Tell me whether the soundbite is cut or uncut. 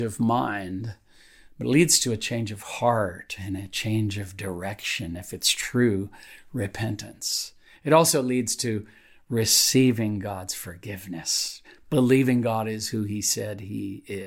uncut